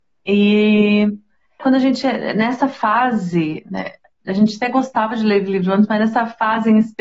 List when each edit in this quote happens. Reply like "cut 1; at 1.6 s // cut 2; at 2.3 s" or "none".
cut 1; at 1.6 s